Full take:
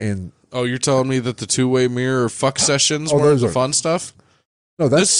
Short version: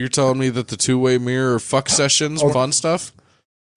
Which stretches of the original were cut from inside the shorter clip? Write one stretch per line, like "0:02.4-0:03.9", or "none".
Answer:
0:03.2-0:03.5